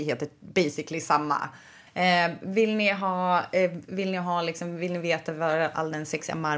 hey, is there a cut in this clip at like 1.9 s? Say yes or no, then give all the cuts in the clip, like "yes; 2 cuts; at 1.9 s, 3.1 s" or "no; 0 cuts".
yes; 1 cut; at 1.9 s